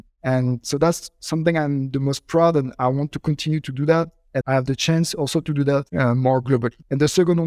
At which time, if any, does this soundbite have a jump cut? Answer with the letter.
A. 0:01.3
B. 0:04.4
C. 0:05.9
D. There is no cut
B